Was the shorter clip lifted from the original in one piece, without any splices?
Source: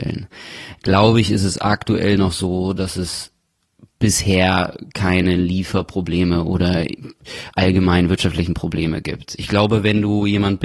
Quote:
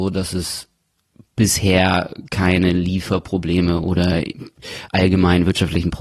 yes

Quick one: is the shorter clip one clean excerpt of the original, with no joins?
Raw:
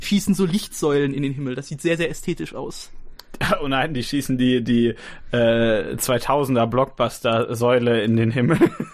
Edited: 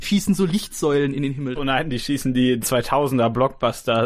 no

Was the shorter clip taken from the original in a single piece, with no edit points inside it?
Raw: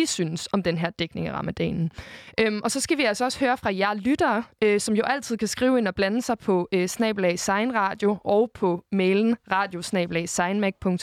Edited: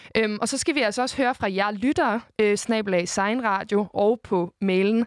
no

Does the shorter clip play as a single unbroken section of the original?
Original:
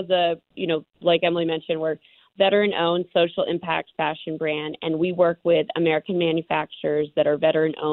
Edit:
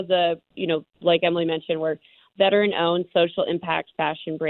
yes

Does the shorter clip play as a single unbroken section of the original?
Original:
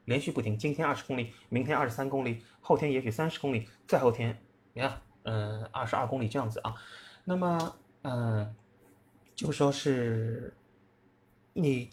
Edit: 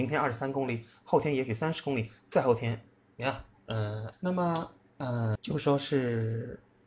no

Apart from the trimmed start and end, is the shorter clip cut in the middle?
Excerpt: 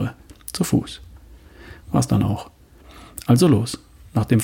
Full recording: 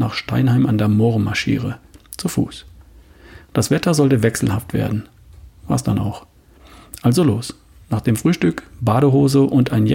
yes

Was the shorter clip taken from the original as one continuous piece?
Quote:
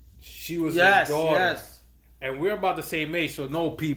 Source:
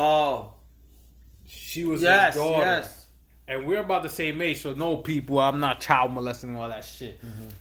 yes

